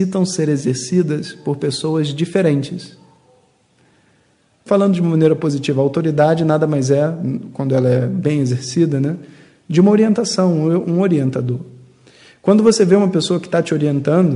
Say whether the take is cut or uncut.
cut